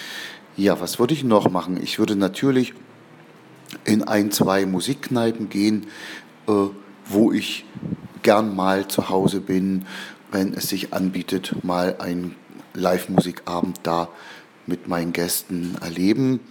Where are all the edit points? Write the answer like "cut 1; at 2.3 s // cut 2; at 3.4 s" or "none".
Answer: cut 1; at 10.2 s